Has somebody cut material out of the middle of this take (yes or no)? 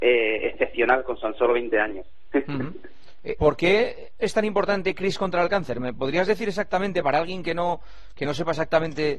yes